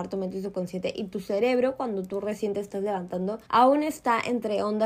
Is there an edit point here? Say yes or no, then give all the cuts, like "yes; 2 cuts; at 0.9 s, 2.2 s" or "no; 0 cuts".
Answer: yes; 1 cut; at 3.4 s